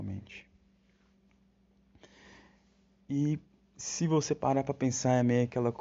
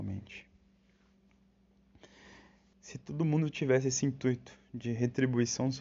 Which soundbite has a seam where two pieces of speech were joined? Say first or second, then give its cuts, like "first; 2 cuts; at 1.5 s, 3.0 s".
second; 1 cut; at 2.7 s